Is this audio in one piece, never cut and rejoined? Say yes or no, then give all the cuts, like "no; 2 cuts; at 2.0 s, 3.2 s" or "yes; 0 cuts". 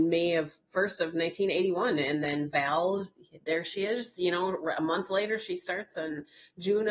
yes; 0 cuts